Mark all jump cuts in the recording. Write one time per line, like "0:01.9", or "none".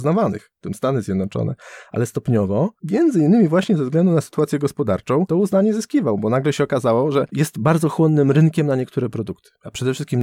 none